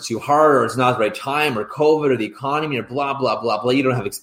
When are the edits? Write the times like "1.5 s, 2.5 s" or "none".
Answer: none